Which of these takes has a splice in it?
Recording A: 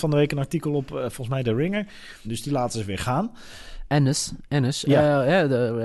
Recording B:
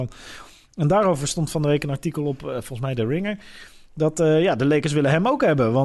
A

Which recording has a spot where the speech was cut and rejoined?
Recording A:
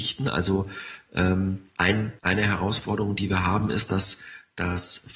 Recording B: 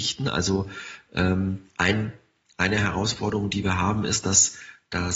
A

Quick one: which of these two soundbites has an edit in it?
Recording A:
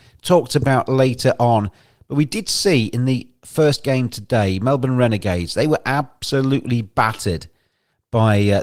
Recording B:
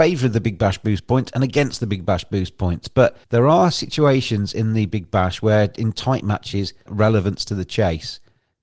B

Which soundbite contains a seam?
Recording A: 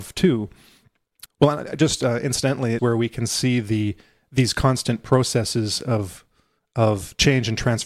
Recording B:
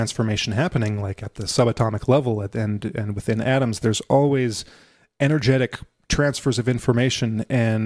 A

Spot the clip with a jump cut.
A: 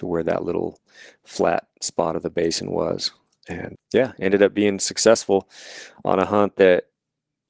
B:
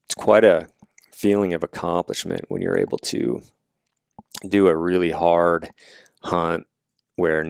A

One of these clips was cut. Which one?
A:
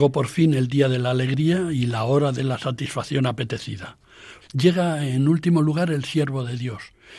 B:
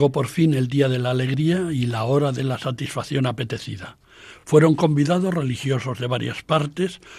A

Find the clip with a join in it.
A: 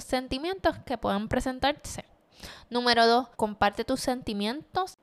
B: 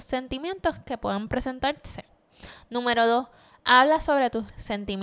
A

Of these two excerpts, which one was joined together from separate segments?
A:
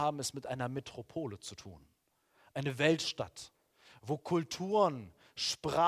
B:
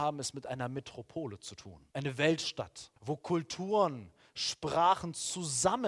B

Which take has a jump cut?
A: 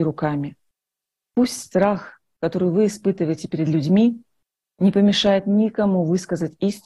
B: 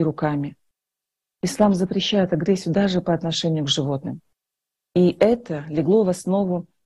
A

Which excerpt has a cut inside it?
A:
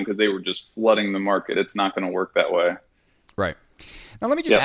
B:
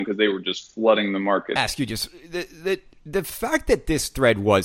B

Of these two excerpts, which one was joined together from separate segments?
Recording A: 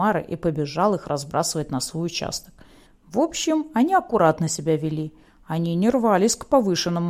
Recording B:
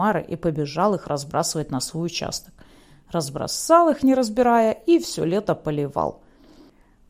A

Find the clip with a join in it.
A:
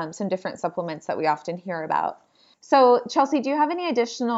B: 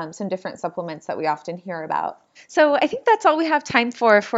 B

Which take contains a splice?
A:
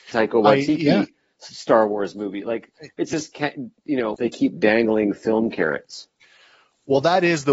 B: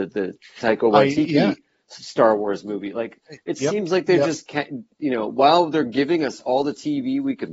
A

